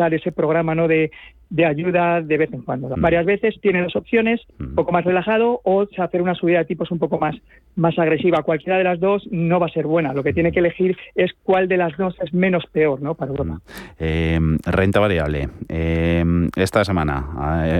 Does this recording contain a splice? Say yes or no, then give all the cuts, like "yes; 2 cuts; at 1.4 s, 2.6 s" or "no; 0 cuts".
yes; 2 cuts; at 2.9 s, 4.5 s